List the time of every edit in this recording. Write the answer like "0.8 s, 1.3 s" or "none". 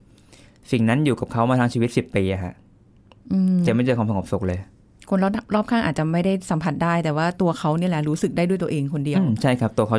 3.7 s